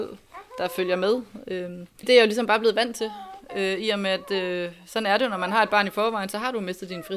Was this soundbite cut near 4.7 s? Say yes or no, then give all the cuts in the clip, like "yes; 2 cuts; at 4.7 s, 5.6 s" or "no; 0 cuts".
no; 1 cut; at 2.0 s